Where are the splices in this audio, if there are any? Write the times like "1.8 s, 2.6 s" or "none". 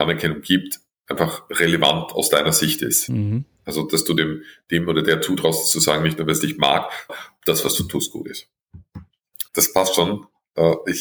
7.1 s, 9.5 s

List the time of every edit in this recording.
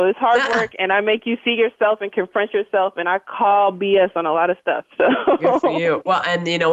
none

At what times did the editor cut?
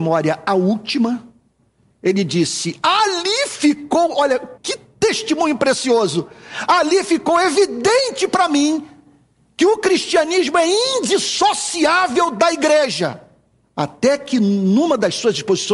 4.6 s, 13.6 s

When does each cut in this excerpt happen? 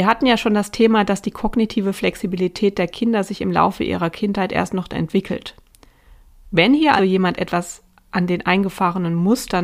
7.0 s

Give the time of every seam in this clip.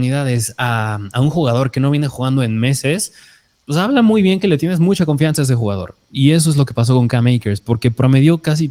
none

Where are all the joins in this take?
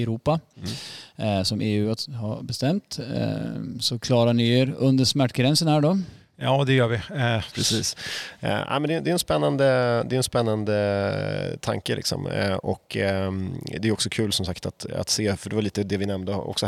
7.5 s

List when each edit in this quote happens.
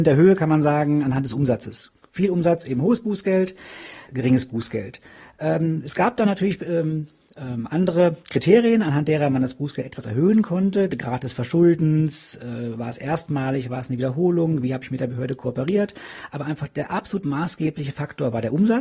4.1 s

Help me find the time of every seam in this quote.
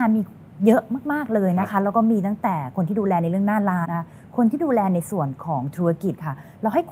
3.8 s

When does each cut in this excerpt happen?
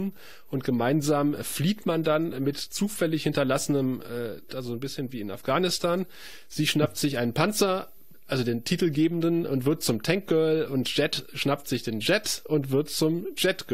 4.5 s

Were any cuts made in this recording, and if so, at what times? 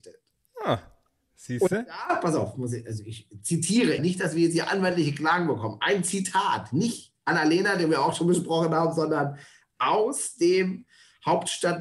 4.0 s

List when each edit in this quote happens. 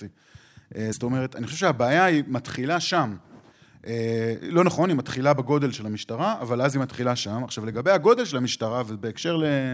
none

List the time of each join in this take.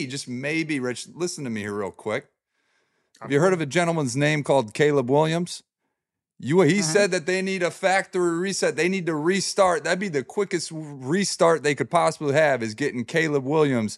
none

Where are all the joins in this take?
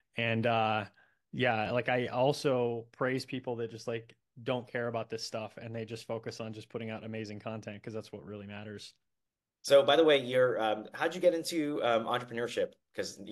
none

